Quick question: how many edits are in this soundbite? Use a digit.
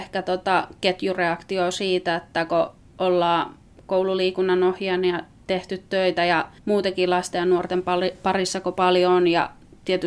1